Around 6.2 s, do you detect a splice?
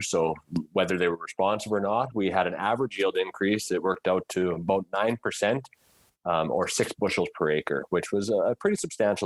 no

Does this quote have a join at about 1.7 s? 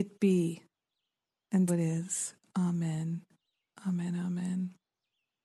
yes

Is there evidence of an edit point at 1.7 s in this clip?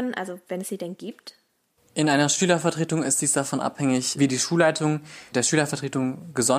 no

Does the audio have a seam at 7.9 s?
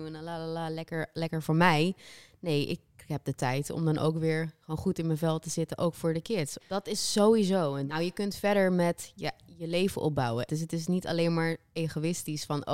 yes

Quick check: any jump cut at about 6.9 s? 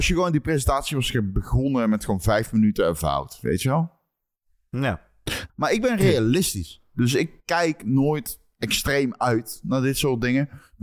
no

